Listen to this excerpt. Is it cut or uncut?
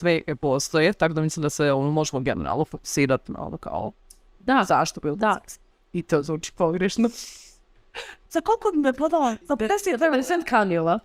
cut